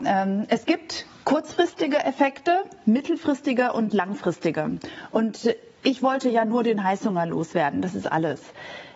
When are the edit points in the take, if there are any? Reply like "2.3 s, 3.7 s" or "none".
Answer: none

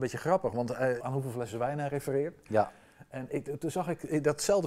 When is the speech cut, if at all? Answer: 1.0 s

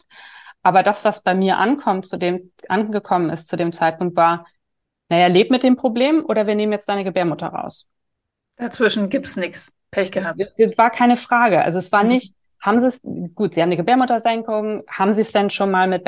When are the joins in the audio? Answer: none

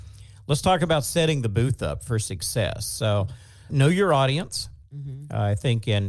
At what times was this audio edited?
3.7 s

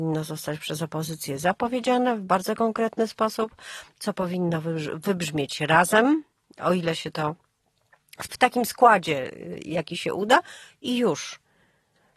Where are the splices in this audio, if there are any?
8.3 s

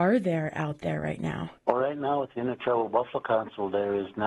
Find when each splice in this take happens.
1.6 s

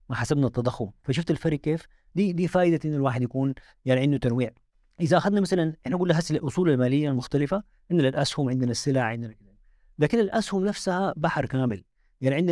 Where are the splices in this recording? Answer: none

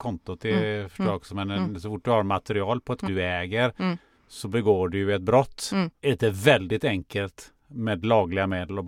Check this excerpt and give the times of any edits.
3.0 s, 6.0 s

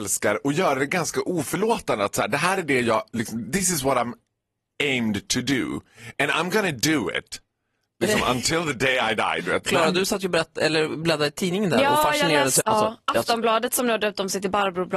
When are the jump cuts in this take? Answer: 12.6 s

